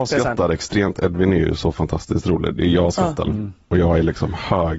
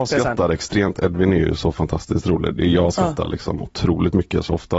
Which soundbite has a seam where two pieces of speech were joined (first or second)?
first